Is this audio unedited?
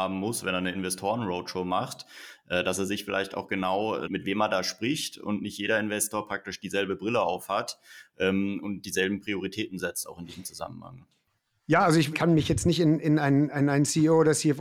no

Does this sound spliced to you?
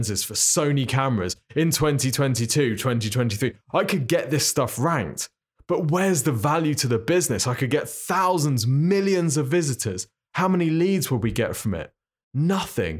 no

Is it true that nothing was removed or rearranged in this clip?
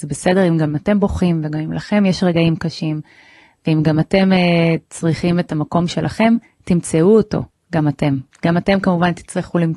yes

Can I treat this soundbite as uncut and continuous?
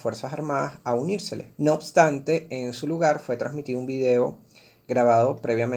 no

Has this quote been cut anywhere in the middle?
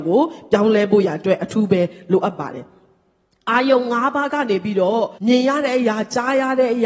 yes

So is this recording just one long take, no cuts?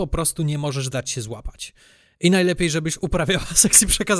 yes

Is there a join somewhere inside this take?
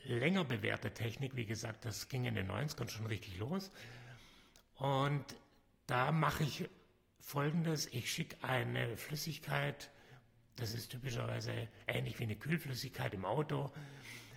no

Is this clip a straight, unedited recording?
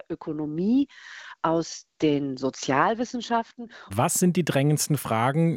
no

